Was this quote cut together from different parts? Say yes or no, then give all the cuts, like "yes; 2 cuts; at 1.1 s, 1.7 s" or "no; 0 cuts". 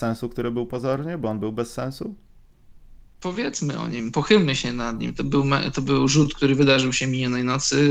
no; 0 cuts